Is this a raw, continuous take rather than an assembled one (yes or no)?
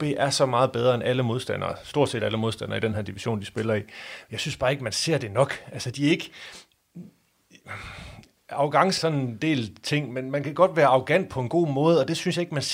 no